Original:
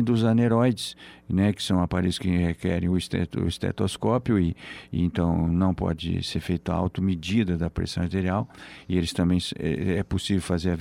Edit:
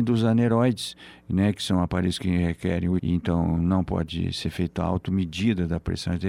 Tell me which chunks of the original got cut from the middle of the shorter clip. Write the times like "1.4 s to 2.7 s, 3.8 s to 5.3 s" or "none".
3.0 s to 4.9 s